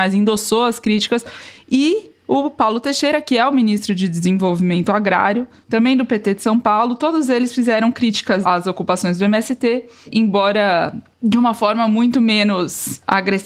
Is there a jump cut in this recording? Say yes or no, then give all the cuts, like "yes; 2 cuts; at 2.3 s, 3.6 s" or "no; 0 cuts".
no; 0 cuts